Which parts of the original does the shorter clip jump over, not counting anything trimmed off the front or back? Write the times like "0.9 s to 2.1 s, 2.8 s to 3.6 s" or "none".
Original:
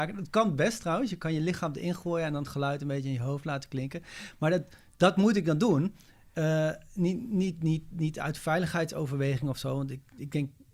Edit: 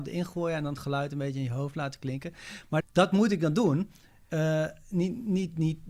4.5 s to 4.8 s

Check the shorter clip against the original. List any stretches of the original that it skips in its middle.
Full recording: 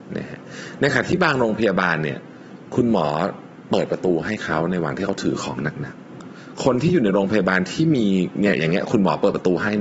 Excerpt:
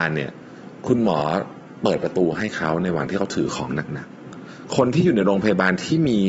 none

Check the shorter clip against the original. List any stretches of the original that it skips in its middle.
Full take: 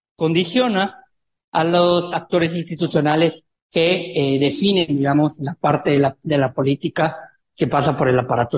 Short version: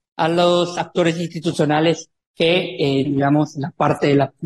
4.4 s to 4.9 s

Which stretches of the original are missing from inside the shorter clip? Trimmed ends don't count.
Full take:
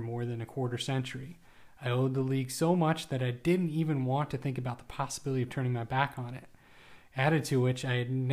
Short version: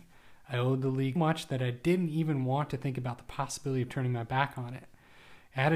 2.5 s to 2.8 s

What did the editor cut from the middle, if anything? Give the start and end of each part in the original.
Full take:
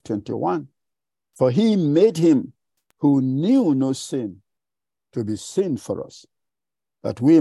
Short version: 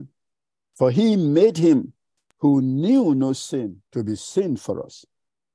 4.5 s to 5.1 s

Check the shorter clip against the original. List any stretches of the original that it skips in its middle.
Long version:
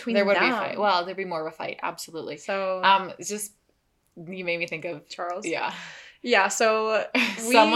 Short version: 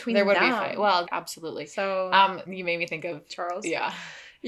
1.1 s to 1.8 s, 3.2 s to 4.3 s

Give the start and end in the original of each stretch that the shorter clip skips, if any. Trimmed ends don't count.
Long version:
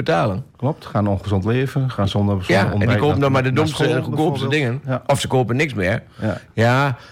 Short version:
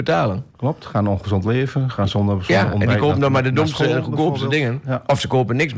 none

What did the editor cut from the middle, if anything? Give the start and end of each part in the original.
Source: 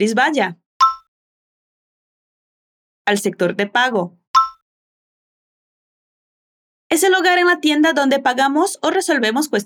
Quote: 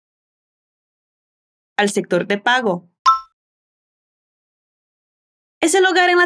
none

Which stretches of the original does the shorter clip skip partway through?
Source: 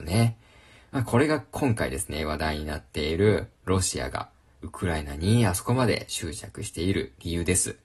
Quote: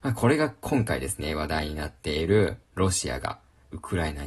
none

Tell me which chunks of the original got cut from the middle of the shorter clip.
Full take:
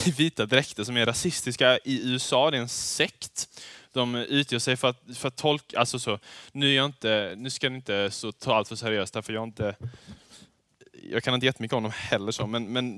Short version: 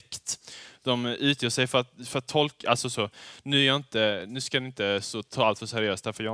none

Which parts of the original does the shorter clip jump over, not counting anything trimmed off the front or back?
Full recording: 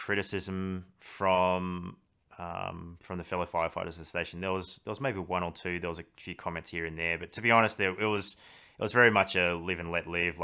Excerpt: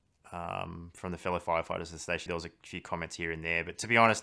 4.3 s to 5.8 s

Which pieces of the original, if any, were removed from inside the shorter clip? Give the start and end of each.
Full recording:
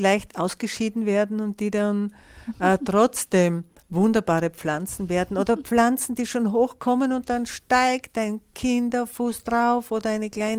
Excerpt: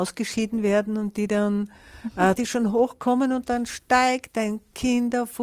2.8 s to 6.2 s

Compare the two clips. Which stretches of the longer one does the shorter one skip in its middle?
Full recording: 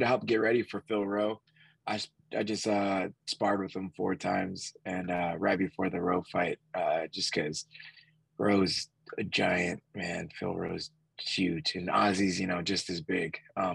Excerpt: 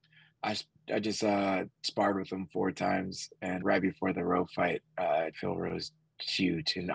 5.1 s to 5.4 s, 7.1 s to 10.3 s

